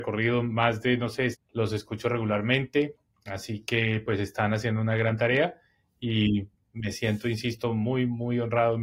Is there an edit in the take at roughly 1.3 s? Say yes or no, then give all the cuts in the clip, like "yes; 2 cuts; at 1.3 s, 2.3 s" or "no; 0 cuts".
yes; 1 cut; at 1.3 s